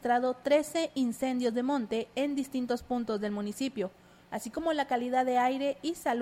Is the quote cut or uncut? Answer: cut